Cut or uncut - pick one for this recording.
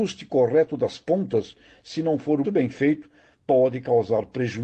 cut